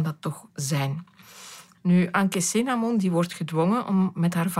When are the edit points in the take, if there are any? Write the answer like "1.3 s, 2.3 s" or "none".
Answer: 1.7 s

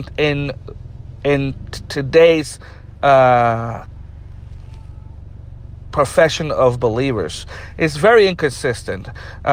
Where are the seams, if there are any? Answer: none

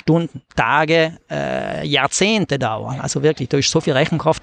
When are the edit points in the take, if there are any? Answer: none

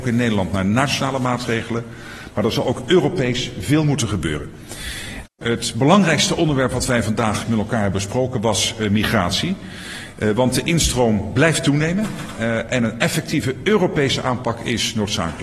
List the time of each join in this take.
5.2 s, 7.4 s

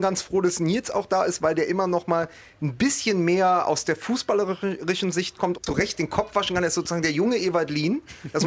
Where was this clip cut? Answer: 5.5 s

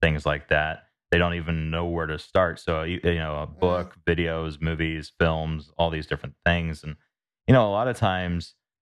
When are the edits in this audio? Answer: none

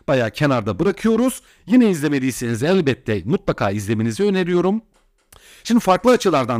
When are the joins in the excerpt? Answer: 1.5 s

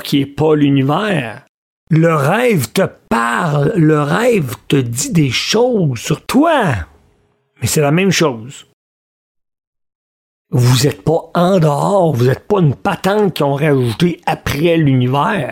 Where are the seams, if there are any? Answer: 1.8 s, 10.4 s

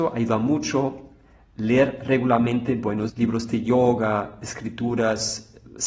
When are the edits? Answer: 3.1 s

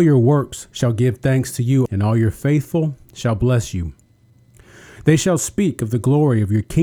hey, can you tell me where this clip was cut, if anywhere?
1.9 s

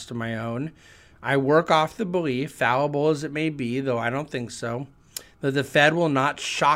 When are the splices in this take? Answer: none

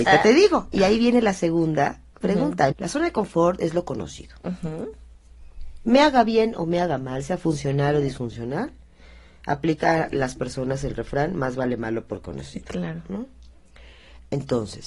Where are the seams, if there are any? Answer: 2.7 s

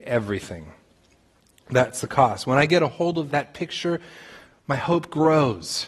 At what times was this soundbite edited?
3.3 s

